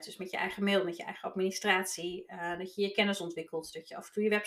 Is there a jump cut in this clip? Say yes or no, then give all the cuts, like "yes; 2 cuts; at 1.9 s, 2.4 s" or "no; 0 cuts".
no; 0 cuts